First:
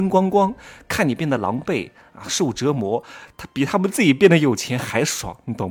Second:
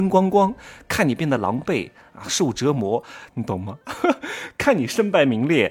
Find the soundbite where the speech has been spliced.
second; 1 cut; at 3.3 s

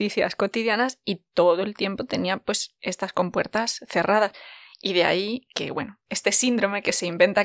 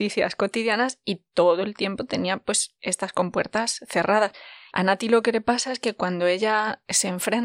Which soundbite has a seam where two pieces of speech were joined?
second; 1 cut; at 4.7 s

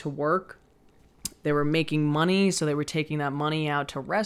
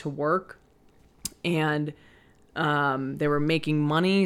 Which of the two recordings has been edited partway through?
first; 1 cut; at 1.4 s

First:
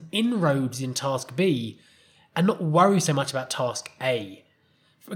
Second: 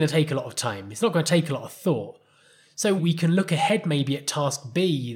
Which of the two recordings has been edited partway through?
second; 1 cut; at 3.0 s

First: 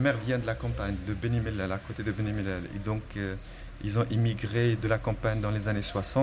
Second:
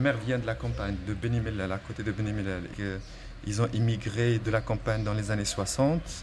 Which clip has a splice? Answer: second; 1 cut; at 2.7 s

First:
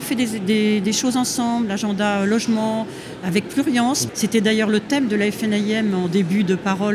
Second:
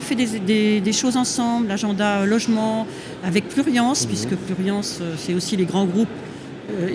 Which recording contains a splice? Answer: first; 1 cut; at 4.1 s

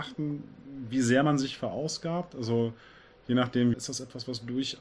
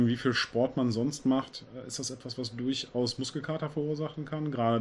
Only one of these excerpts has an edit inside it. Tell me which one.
first; 1 cut; at 3.7 s

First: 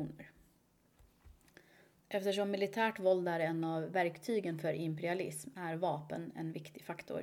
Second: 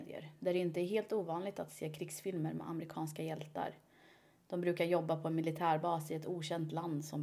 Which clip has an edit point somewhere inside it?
first; 1 cut; at 1.9 s

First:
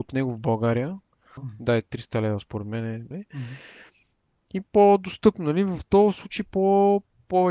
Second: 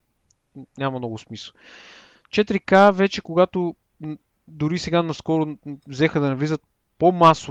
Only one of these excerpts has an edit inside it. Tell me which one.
first; 2 cuts; at 1.4 s, 3.1 s

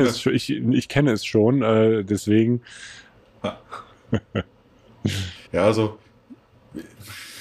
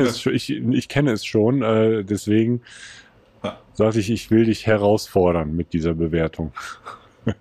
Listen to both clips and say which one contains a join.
first; 2 cuts; at 3.6 s, 5.5 s

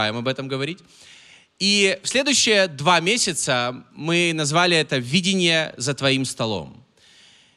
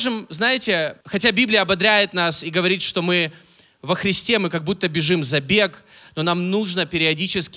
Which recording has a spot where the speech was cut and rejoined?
second; 1 cut; at 1.0 s

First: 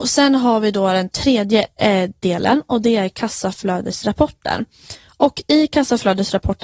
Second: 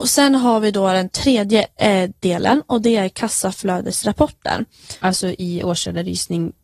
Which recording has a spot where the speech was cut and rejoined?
second; 1 cut; at 5.0 s

